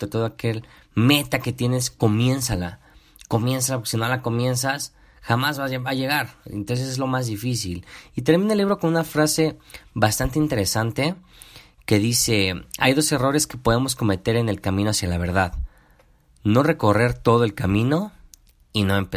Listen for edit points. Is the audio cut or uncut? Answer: uncut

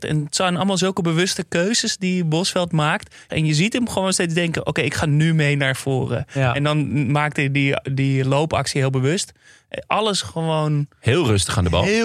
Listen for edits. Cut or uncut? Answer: cut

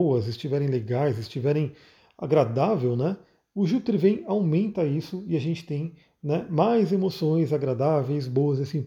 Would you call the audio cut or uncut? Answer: uncut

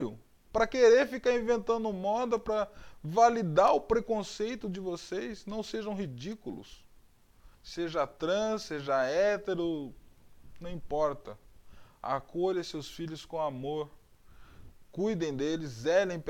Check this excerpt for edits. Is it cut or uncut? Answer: cut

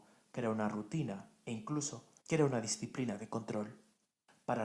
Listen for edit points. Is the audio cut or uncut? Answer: cut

